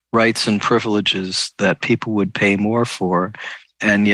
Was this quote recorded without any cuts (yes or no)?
yes